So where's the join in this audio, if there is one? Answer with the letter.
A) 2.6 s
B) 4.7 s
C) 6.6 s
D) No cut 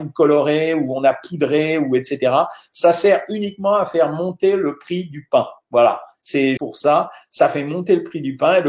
C